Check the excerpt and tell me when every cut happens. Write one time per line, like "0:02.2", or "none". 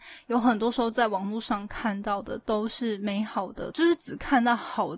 0:03.7